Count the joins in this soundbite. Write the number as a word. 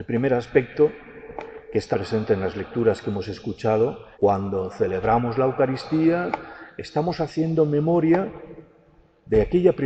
two